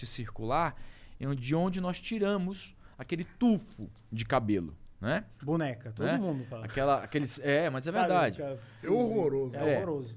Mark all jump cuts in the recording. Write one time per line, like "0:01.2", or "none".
0:05.4